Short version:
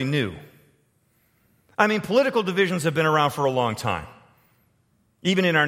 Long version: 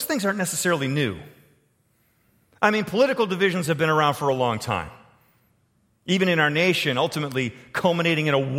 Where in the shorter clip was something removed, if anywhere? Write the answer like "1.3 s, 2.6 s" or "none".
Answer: none